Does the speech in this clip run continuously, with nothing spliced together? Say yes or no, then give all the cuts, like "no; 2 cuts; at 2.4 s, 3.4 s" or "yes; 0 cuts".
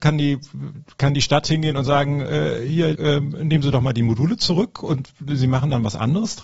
no; 1 cut; at 2.9 s